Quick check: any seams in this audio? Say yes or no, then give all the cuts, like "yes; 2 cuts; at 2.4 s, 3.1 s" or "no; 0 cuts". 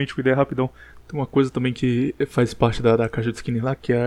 yes; 1 cut; at 1.0 s